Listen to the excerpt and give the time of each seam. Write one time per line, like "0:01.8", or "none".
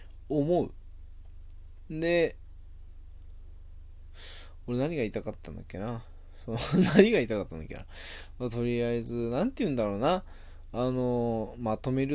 0:01.9